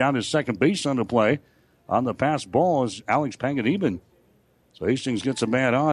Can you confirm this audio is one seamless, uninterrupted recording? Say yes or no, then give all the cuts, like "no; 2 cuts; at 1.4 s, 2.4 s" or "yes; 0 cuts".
yes; 0 cuts